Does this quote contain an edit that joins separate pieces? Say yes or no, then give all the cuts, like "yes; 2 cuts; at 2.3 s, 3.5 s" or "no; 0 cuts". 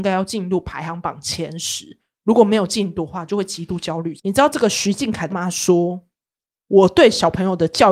yes; 2 cuts; at 4.2 s, 5.3 s